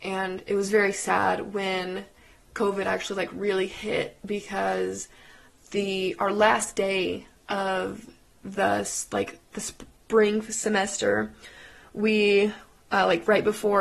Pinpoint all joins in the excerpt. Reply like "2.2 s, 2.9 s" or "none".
none